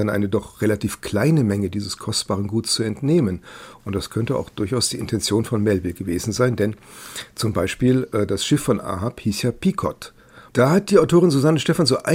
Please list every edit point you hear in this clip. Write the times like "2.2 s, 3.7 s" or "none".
3.8 s, 10.5 s